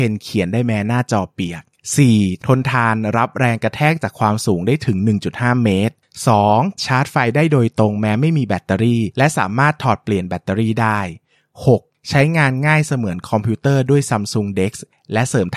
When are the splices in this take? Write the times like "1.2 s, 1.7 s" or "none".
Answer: 2.4 s, 6.8 s